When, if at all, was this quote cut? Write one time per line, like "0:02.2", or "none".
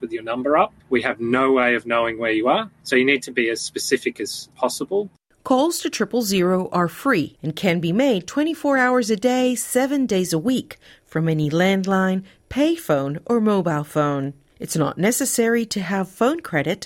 none